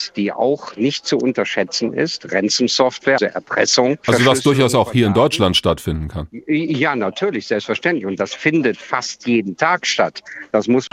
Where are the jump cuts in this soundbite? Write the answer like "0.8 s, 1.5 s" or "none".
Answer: 3.2 s